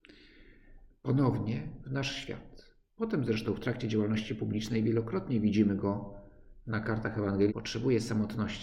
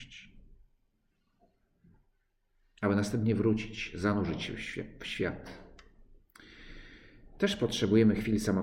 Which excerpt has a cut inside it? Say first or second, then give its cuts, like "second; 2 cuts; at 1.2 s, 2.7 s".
first; 2 cuts; at 2.8 s, 7.5 s